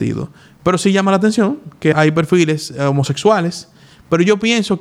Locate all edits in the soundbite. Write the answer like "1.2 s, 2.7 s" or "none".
1.9 s